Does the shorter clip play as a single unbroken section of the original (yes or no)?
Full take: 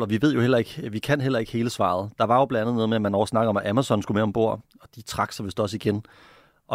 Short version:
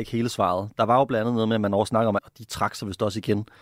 no